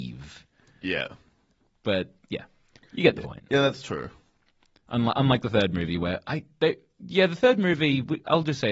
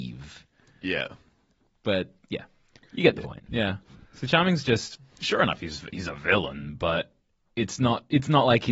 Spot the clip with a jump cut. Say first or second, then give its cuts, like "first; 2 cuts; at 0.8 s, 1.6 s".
second; 1 cut; at 3.5 s